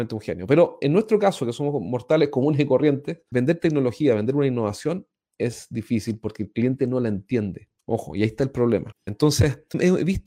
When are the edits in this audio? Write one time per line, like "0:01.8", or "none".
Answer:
0:08.9